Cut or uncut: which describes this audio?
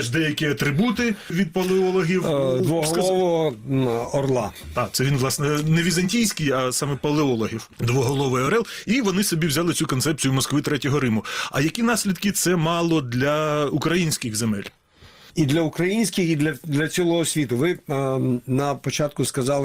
uncut